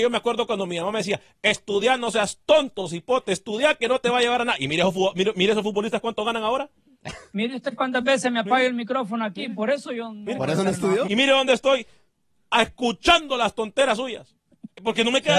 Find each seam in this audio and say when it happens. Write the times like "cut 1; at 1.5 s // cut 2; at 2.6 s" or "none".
cut 1; at 11.0 s